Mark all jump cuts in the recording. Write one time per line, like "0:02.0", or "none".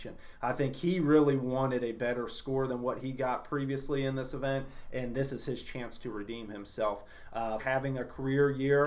0:07.6